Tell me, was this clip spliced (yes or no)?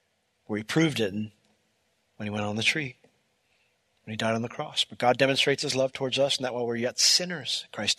no